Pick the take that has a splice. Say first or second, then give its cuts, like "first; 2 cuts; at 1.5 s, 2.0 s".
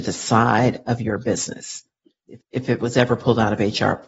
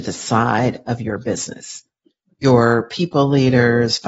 first; 1 cut; at 2.3 s